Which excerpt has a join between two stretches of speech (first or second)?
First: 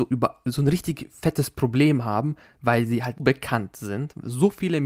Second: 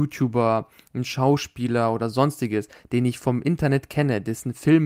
first